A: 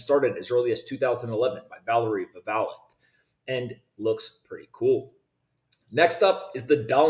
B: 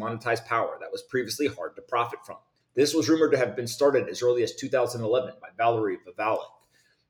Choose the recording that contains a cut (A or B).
B